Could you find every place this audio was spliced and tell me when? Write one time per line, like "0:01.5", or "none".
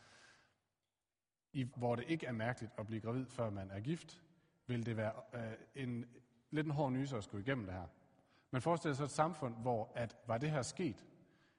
0:01.7

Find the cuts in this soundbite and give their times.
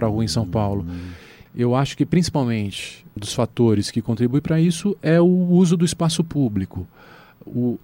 0:01.5
0:03.2

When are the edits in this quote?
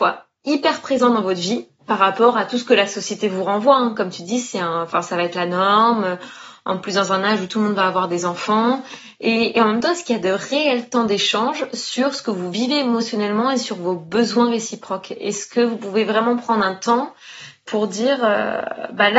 none

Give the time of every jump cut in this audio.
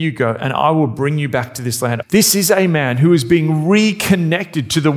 0:02.0

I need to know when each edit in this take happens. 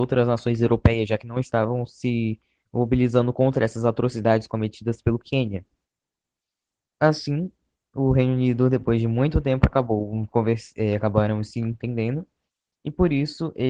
none

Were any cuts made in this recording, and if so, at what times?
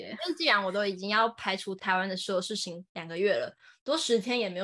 0:01.8

